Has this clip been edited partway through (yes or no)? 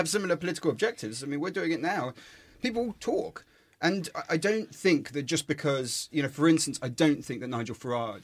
no